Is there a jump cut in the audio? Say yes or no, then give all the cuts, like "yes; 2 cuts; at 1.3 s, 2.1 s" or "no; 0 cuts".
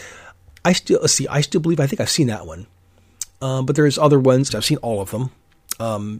yes; 1 cut; at 4.5 s